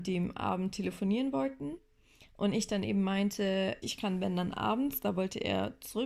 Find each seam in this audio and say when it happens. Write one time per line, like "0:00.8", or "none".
0:03.8